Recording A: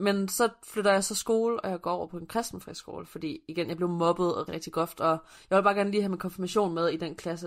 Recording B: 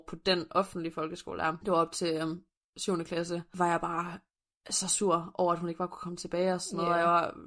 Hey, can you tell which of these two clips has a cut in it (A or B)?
A